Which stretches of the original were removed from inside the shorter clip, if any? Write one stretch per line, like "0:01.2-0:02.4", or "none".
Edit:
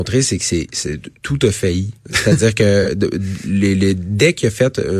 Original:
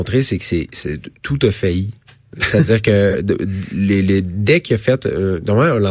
0:02.0-0:02.3